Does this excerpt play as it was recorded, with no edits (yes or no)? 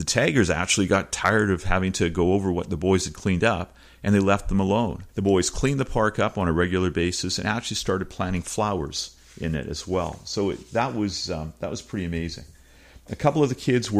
no